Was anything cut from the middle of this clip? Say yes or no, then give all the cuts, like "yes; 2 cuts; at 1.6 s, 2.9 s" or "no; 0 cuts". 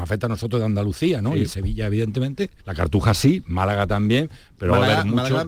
yes; 1 cut; at 2.6 s